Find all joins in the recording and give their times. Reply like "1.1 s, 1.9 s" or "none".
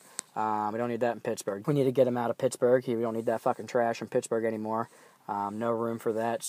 1.6 s